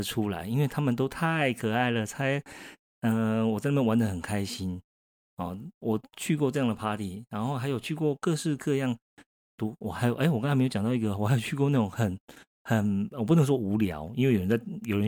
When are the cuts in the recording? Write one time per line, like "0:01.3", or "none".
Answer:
none

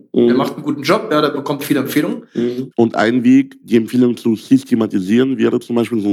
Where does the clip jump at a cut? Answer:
0:02.7

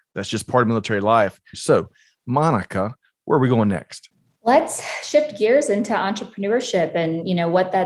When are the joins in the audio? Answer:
0:01.5

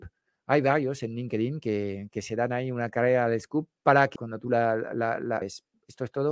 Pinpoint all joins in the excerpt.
0:04.2
0:05.4

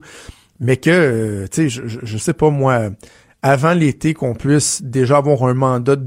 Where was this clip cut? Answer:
none

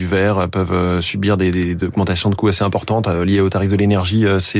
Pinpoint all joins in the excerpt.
none

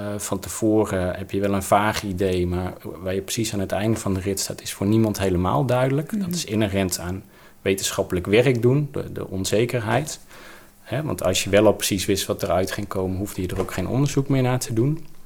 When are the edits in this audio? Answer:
none

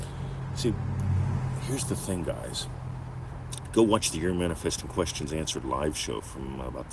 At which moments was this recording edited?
none

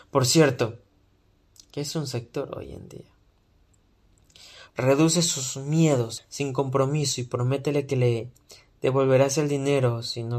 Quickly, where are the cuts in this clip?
0:04.7
0:06.2

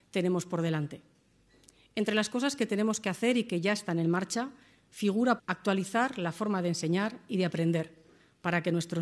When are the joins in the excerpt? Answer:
0:05.4

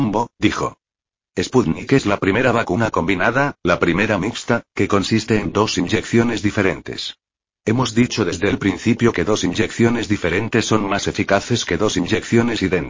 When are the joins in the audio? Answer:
none

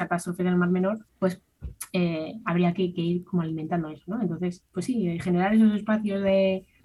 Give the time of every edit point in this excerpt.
0:01.1

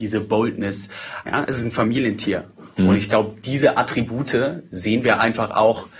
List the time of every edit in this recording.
0:01.2

